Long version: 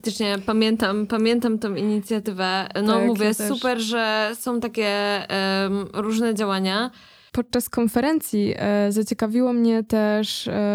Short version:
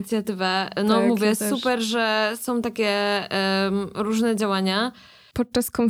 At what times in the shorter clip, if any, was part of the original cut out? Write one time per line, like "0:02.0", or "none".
none